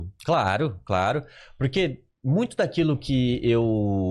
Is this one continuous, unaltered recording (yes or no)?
yes